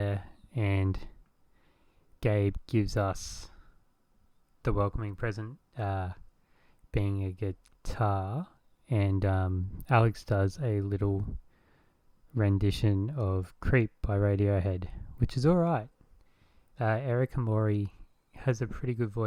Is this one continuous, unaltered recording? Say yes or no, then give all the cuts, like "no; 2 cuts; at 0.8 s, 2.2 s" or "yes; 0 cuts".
yes; 0 cuts